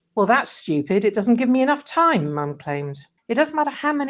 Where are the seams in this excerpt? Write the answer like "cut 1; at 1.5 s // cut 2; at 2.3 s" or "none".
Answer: cut 1; at 3.2 s